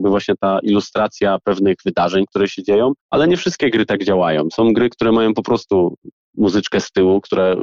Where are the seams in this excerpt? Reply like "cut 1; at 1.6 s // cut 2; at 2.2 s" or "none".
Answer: cut 1; at 3.0 s